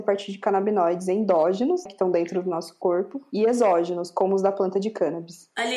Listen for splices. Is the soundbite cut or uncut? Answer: cut